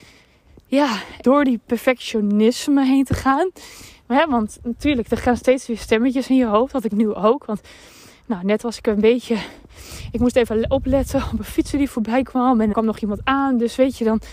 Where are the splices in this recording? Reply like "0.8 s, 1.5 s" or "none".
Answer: 1.2 s, 12.7 s